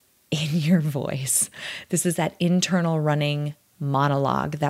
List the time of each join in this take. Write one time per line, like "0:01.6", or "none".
none